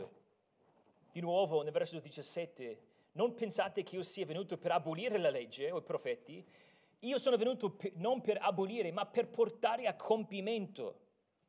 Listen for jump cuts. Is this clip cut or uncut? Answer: cut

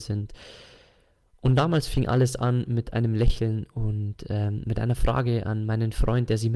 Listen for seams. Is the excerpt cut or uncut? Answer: uncut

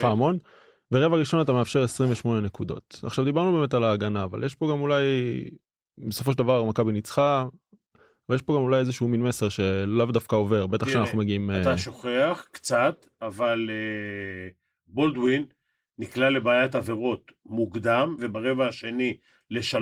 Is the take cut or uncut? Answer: cut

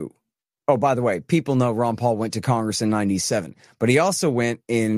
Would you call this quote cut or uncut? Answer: uncut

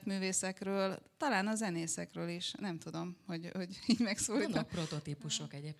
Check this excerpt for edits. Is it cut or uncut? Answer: uncut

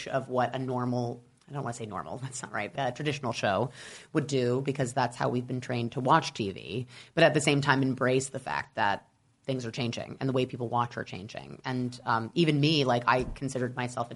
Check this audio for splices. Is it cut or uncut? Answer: cut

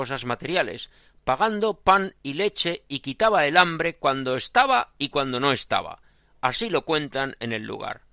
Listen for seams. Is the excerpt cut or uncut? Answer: uncut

